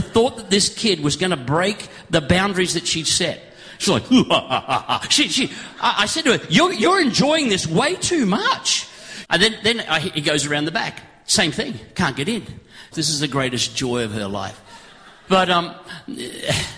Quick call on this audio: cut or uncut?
cut